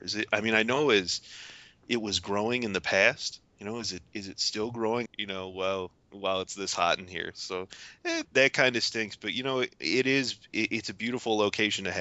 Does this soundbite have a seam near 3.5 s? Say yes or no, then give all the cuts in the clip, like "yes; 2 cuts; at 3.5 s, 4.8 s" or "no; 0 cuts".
no; 2 cuts; at 5.1 s, 8.2 s